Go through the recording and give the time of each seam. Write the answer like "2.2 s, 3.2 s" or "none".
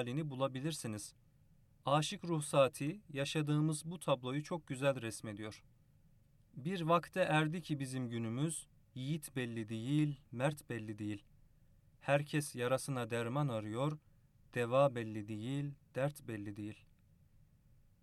none